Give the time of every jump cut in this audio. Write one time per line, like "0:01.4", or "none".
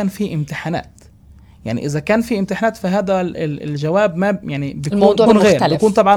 0:05.3